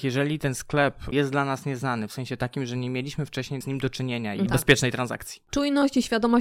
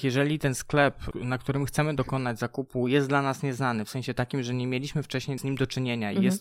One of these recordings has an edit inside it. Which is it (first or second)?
first